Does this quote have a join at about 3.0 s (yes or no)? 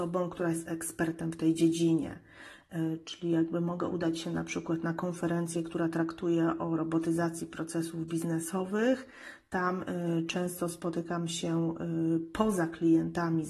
no